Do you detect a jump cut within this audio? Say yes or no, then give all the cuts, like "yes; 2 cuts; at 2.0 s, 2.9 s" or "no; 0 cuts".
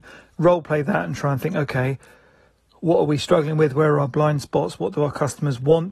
no; 0 cuts